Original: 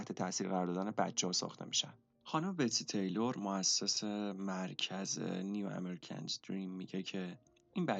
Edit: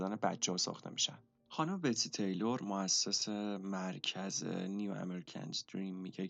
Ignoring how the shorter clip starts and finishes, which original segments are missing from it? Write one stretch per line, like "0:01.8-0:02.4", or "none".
none